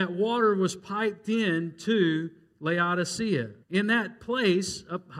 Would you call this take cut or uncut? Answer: cut